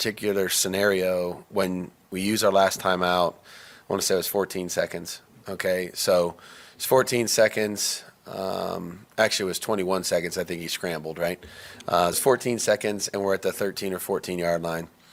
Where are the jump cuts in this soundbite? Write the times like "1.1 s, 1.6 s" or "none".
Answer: 12.1 s